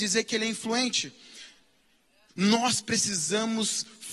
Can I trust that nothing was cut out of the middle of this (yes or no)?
no